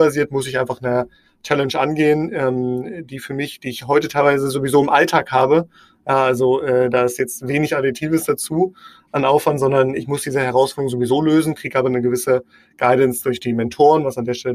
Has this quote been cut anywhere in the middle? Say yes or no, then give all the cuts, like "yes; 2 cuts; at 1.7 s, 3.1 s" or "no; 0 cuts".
no; 0 cuts